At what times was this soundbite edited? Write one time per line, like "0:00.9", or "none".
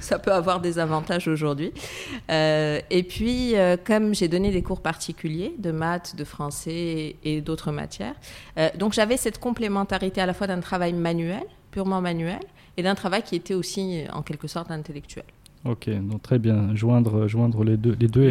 none